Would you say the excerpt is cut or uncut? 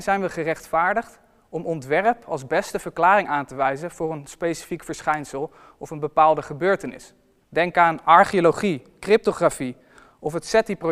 cut